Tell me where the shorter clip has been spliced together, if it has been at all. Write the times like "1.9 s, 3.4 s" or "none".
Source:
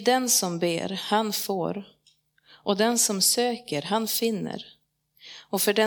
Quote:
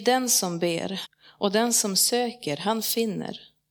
1.0 s